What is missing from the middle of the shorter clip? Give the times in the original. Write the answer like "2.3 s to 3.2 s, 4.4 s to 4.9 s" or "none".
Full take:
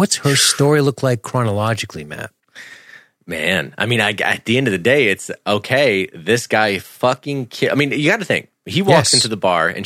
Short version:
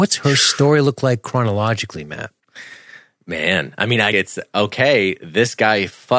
4.1 s to 5.1 s